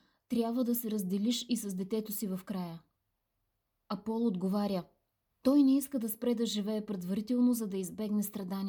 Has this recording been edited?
yes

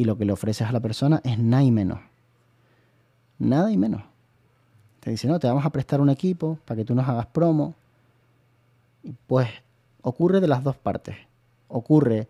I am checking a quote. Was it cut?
yes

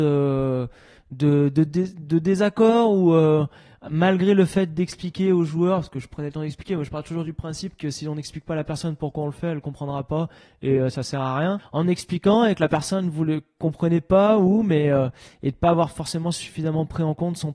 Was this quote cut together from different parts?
yes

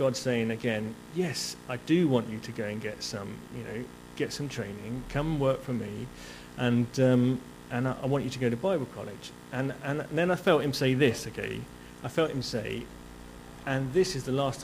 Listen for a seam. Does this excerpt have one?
no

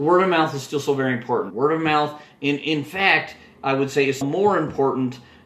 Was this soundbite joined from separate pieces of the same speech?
yes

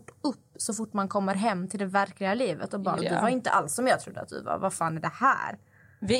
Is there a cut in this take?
yes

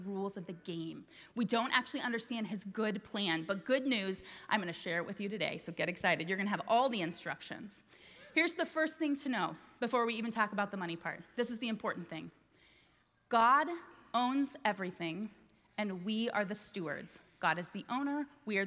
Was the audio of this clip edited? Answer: no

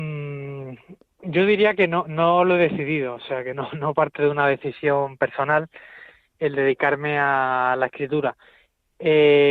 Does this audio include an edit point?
no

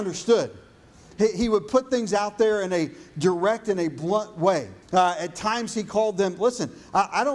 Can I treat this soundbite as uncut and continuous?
no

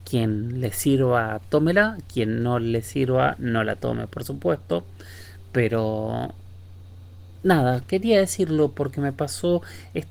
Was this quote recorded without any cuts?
yes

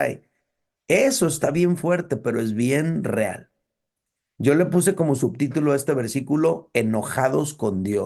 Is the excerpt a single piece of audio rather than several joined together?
yes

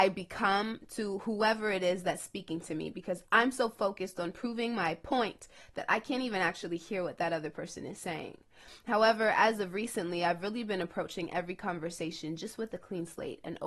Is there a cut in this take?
no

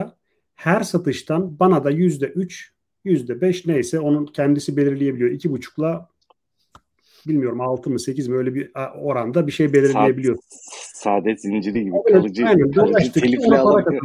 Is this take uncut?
yes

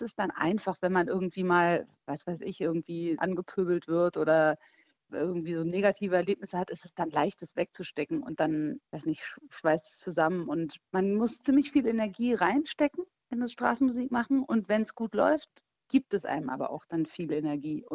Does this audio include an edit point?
no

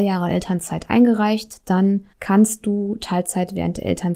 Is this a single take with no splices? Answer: no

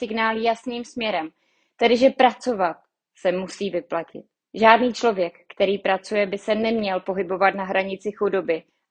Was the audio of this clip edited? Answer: no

